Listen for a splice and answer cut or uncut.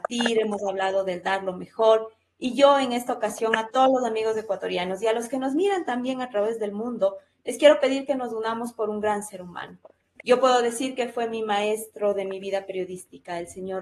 uncut